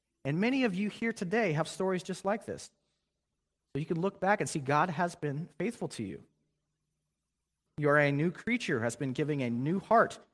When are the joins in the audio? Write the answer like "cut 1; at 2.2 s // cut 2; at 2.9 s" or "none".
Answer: cut 1; at 7.7 s